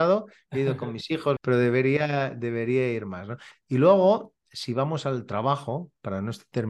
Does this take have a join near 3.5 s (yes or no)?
yes